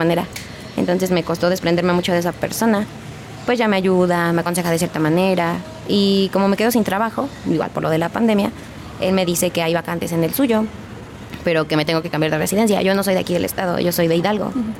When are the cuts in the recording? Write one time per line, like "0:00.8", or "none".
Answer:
none